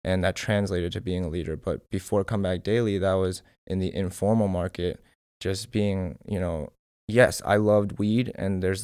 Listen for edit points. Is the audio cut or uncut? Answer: uncut